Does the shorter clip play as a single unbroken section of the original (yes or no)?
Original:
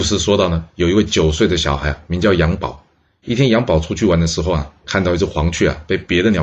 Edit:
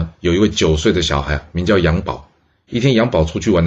yes